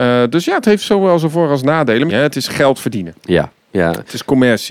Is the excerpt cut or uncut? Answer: cut